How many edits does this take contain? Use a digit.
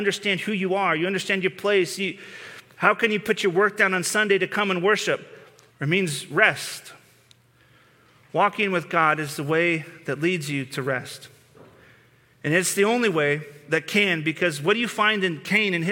1